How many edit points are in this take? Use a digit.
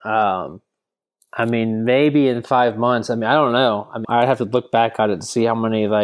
1